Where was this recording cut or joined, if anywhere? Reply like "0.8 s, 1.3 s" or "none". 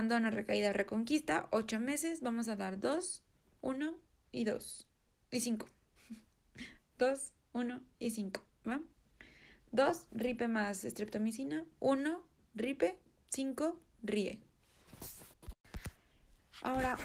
none